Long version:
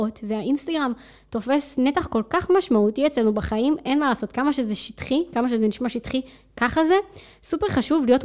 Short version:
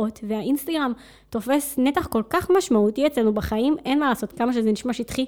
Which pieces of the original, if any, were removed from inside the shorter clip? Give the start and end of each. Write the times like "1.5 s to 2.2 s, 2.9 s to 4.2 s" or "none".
4.3 s to 5.3 s